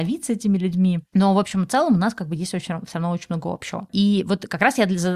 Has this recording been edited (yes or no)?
no